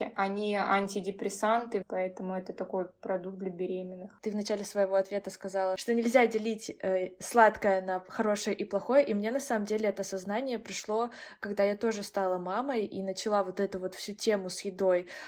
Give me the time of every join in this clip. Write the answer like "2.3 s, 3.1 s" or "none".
1.8 s